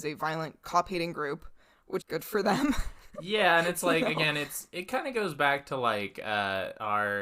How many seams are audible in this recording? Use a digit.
1